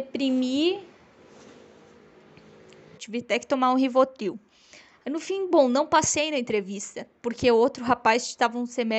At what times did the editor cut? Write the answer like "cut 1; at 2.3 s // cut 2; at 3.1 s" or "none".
cut 1; at 3.0 s